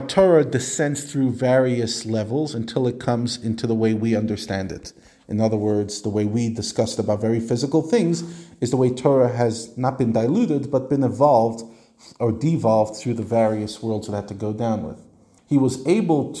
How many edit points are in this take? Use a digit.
1